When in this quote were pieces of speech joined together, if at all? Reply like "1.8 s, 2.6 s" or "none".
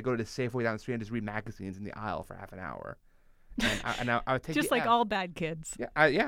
none

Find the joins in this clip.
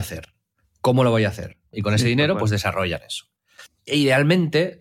1.7 s, 3.7 s

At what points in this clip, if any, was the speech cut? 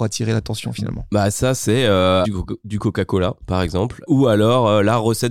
2.2 s, 4.1 s

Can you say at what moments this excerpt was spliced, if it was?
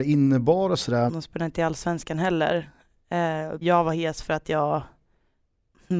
1.1 s, 3.6 s

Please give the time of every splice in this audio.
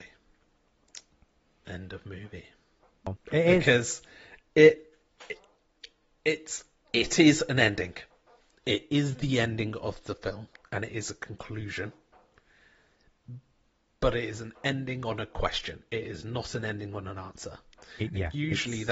3.2 s

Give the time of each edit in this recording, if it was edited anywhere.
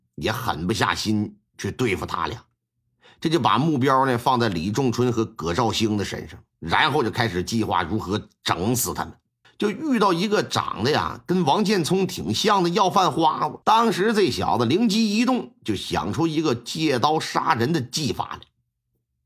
9.4 s, 13.6 s

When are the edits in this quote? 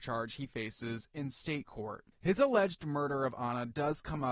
2.1 s

